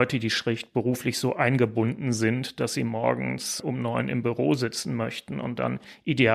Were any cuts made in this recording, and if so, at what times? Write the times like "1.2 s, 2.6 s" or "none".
none